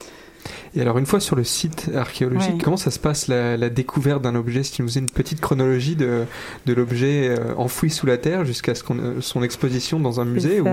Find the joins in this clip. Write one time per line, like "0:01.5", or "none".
0:02.6